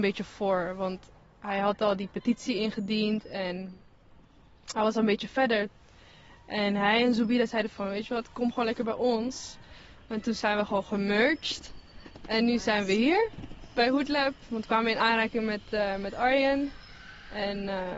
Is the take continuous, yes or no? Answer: yes